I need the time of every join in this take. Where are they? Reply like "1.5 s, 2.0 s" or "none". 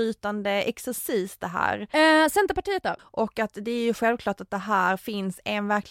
1.9 s, 3.0 s